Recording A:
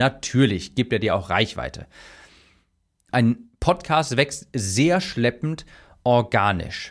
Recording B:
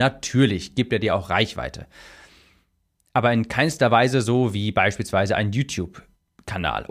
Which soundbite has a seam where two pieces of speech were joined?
A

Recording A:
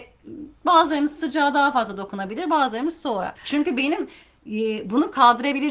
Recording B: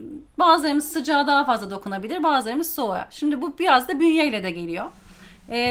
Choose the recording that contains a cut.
A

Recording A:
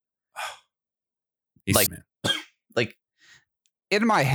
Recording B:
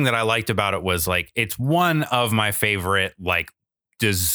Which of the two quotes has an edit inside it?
A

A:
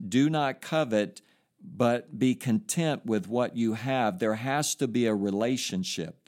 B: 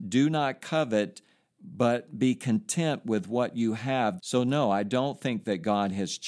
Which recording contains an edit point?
B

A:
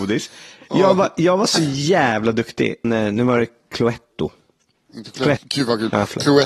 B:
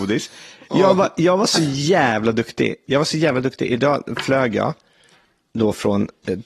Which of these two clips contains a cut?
A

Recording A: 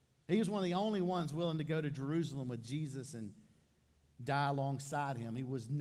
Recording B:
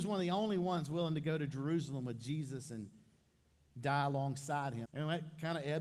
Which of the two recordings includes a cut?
B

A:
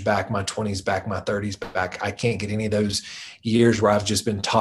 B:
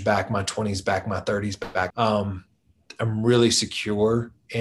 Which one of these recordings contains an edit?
B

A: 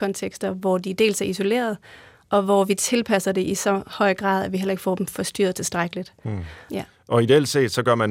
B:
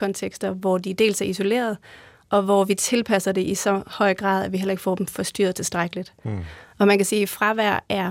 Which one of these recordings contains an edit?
A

